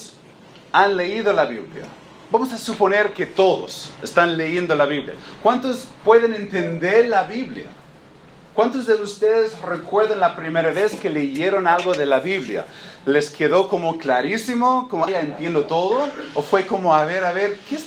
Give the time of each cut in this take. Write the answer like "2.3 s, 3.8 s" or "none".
15.1 s